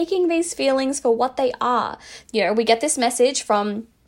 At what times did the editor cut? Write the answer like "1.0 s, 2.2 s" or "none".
2.2 s